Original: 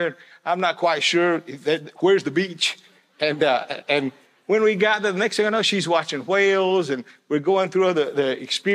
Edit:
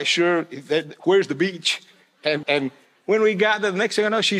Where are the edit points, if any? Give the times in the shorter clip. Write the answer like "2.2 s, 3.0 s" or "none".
2.4 s